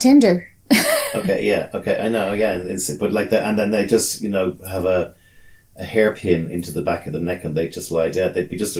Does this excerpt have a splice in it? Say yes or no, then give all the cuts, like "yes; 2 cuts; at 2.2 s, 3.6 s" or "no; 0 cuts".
no; 0 cuts